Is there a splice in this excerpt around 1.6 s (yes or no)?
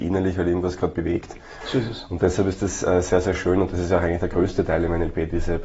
yes